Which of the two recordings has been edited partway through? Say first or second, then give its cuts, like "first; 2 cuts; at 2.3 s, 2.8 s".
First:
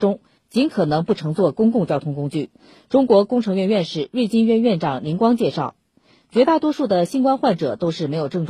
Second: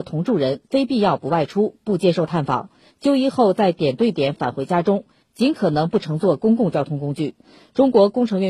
second; 1 cut; at 2.9 s